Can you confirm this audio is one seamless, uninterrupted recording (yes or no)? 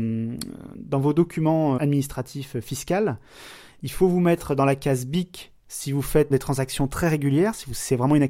no